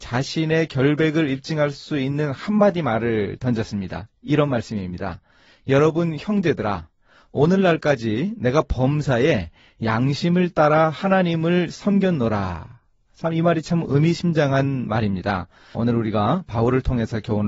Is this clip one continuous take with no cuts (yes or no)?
no